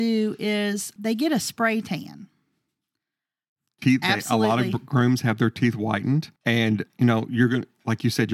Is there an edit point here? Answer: yes; 3 cuts; at 1.0 s, 3.7 s, 6.4 s

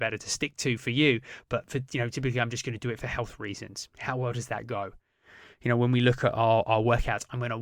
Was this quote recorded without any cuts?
yes; 0 cuts

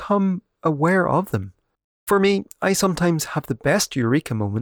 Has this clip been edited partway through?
yes; 1 cut; at 1.8 s

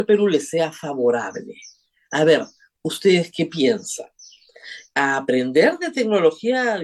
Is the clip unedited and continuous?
no; 1 cut; at 4.9 s

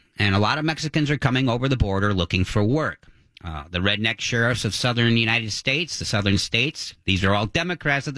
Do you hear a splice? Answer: no; 0 cuts

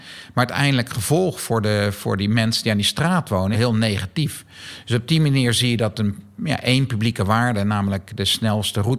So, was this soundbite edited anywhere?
yes; 1 cut; at 3.5 s

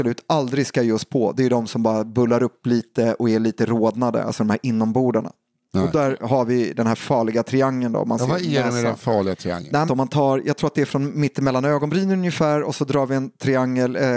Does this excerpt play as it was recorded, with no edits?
no; 1 cut; at 9.9 s

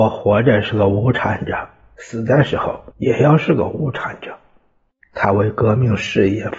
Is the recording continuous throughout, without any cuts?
no; 2 cuts; at 2.9 s, 5.0 s

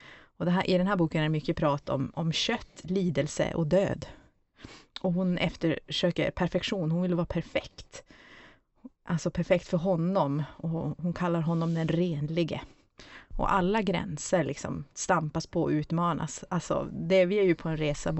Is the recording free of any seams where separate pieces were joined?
yes; 0 cuts

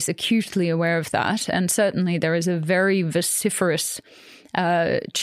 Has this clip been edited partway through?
no; 0 cuts

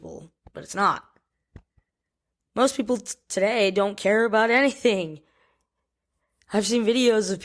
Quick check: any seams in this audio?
no; 0 cuts

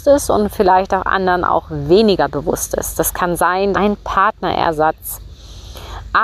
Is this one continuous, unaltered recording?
no; 1 cut; at 3.7 s

